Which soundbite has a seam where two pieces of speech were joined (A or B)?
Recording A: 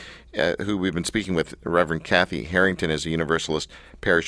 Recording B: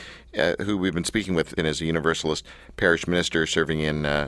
B